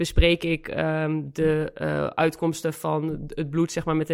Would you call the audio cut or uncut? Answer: uncut